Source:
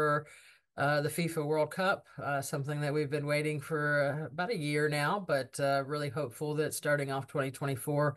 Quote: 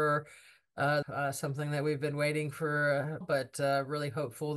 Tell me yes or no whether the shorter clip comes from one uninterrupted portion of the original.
no